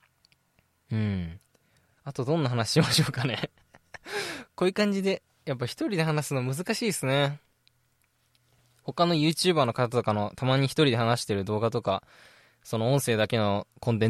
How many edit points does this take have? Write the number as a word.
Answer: zero